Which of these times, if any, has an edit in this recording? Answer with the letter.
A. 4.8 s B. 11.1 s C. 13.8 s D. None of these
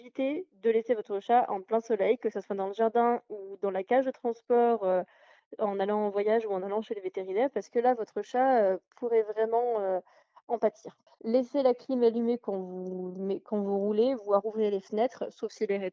B